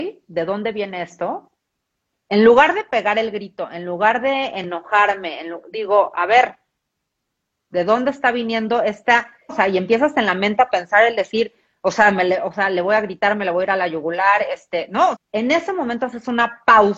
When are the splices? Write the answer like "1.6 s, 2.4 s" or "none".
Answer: 2.1 s, 9.5 s, 15.1 s